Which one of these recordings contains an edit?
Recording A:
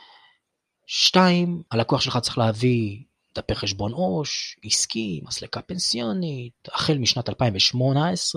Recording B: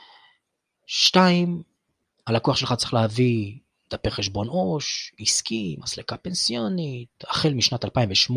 A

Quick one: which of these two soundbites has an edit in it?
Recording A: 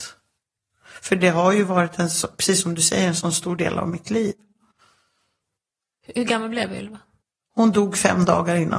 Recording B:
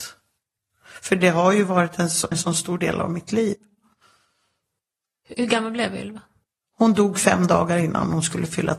B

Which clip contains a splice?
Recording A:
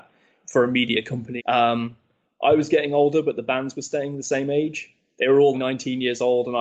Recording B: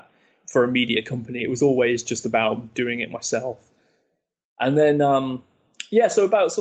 A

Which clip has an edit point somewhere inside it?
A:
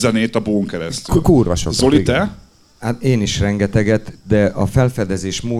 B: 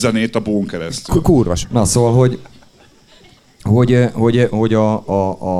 B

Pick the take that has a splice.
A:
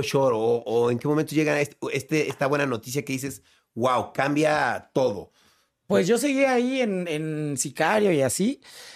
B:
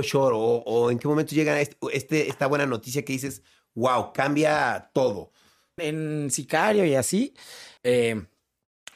B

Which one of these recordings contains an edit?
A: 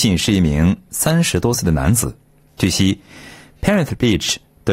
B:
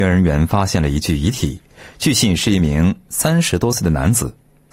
A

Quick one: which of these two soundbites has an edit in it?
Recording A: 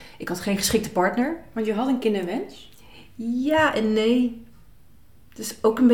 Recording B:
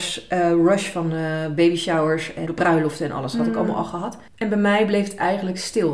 B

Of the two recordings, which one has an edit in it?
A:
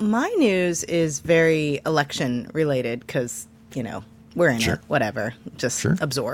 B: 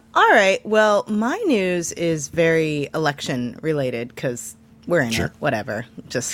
B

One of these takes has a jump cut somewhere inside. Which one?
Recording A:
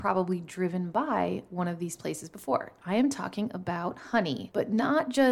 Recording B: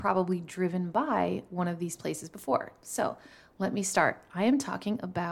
A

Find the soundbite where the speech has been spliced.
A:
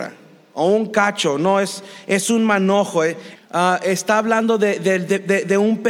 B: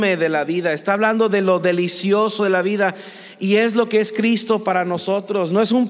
A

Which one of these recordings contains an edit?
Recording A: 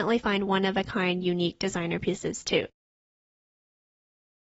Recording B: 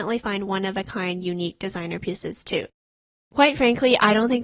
B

